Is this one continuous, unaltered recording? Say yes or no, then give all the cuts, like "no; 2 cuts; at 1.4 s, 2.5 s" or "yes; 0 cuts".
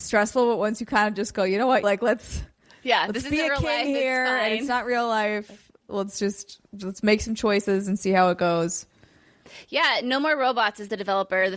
no; 1 cut; at 1.8 s